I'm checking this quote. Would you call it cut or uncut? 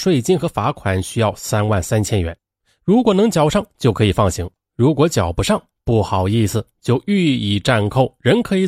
uncut